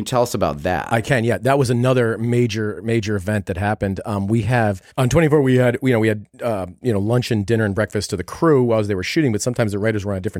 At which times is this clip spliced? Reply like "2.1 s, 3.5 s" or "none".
4.9 s, 6.8 s